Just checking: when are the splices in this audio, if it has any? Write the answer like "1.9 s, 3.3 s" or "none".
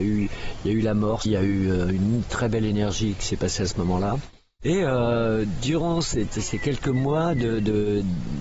1.3 s